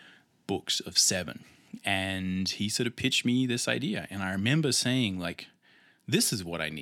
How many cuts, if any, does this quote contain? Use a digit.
0